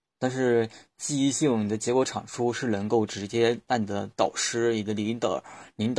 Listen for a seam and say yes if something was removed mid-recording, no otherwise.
no